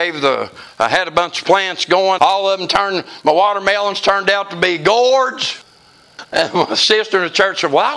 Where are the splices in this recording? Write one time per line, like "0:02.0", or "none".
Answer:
0:02.2
0:06.2